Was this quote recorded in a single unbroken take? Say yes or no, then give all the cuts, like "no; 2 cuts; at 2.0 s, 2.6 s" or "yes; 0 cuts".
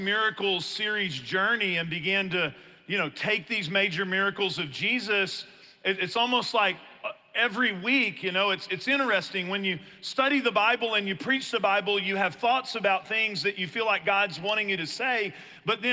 yes; 0 cuts